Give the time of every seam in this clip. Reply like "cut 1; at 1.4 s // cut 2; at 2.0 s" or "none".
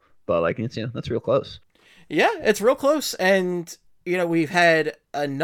none